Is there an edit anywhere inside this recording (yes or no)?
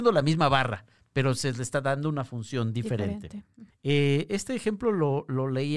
yes